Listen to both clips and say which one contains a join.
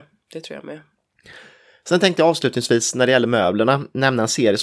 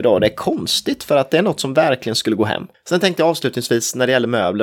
second; 1 cut; at 2.7 s

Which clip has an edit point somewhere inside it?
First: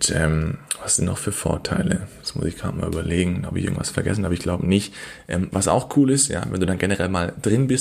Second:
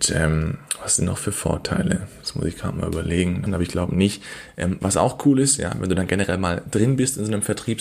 second; 1 cut; at 3.5 s

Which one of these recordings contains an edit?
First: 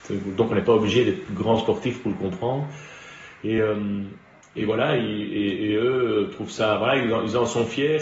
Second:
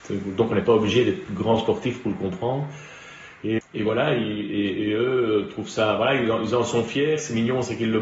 second; 1 cut; at 3.6 s

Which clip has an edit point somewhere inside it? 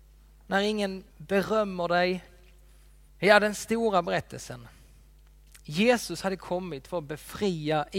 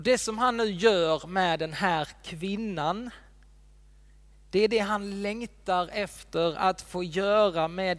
first; 2 cuts; at 1.1 s, 3.1 s

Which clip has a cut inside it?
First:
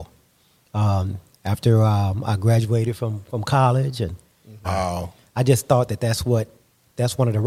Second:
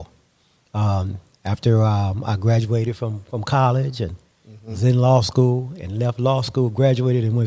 first; 1 cut; at 4.6 s

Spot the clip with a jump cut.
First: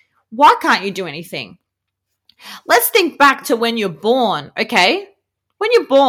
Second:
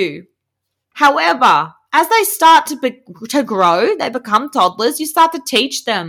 second; 1 cut; at 0.9 s

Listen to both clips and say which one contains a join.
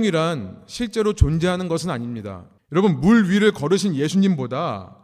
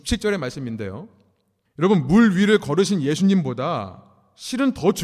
first; 1 cut; at 2.6 s

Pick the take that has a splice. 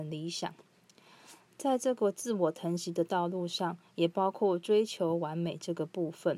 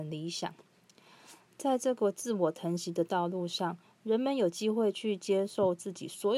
first; 1 cut; at 3.9 s

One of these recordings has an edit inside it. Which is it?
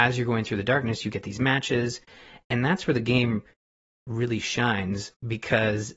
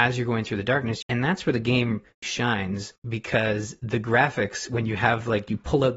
second; 2 cuts; at 1.0 s, 2.2 s

